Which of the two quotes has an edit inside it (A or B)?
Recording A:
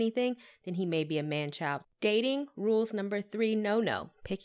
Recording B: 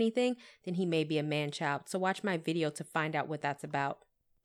A